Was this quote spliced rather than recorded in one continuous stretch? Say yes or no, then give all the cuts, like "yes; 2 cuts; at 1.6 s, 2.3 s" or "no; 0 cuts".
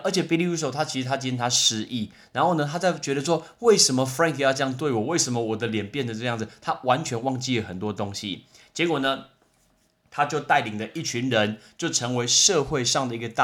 no; 0 cuts